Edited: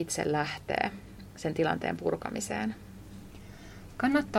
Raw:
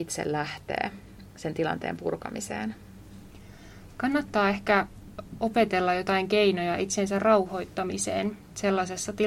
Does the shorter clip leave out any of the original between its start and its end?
no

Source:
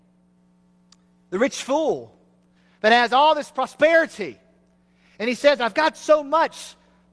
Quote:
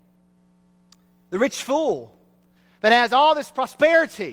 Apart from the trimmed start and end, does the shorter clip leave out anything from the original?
no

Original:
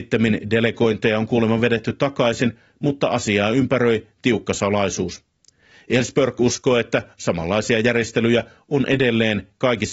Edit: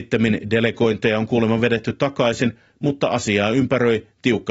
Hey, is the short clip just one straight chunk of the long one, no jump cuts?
yes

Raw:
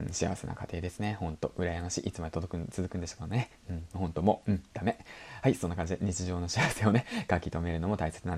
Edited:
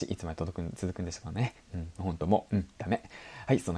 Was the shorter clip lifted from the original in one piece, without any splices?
yes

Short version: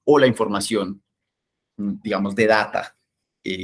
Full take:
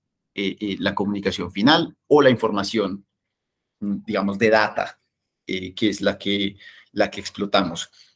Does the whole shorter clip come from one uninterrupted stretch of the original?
yes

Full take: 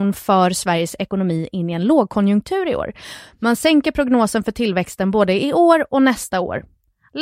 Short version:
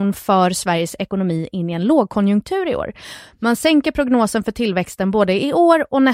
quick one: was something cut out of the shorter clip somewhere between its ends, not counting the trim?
no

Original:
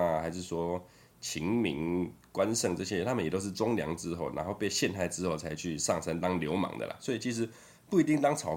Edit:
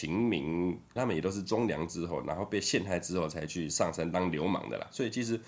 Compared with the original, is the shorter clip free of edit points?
no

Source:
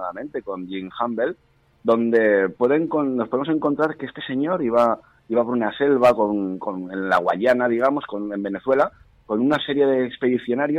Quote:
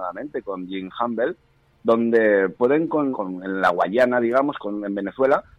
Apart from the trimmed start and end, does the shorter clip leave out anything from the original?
yes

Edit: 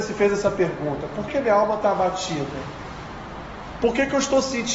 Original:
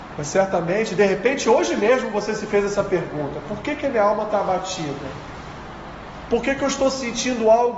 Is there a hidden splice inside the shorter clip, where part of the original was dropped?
yes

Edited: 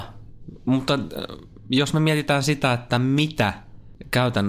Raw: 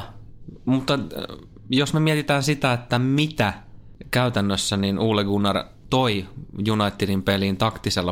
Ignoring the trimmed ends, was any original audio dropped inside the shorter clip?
no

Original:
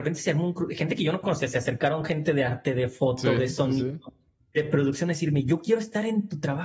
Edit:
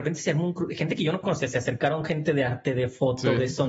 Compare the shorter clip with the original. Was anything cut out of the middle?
no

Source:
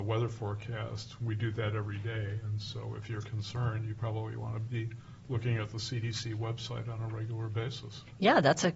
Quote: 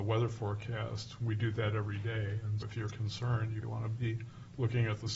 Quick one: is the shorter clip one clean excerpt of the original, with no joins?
no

